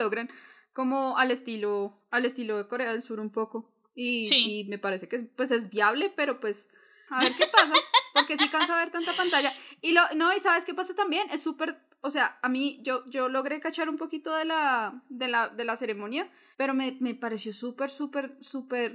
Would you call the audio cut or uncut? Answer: cut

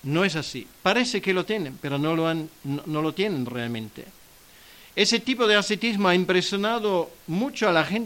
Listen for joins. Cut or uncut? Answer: uncut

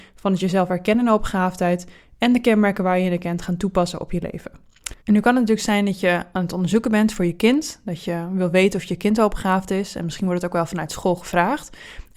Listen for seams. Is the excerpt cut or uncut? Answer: cut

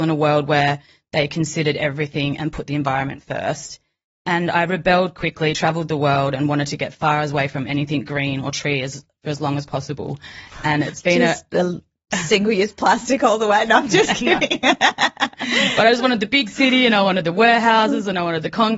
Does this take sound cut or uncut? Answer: uncut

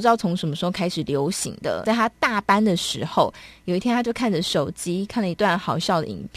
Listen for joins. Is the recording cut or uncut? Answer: cut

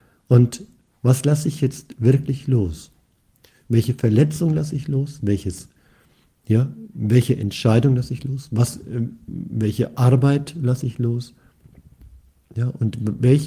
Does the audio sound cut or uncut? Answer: uncut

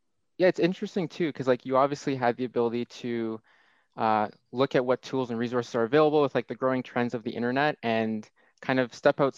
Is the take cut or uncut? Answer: uncut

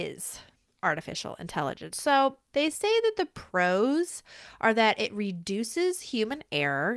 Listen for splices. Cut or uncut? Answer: uncut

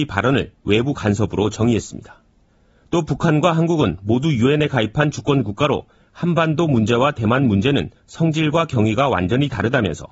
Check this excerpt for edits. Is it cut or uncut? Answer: uncut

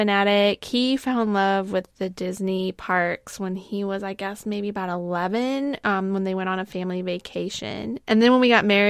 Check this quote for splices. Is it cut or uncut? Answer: uncut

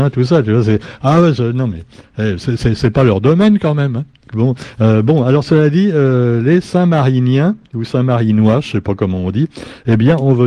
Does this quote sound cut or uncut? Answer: cut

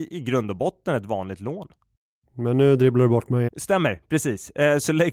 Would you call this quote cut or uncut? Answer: cut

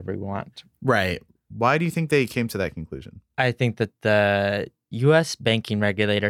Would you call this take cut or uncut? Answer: cut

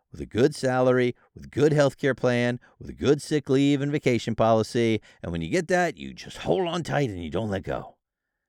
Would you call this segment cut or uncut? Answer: uncut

